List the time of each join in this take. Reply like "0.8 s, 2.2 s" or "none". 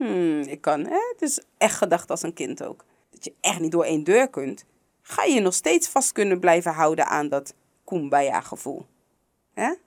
3.0 s